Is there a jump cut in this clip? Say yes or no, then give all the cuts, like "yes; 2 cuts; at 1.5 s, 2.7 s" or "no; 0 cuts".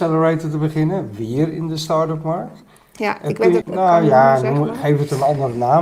yes; 1 cut; at 3.6 s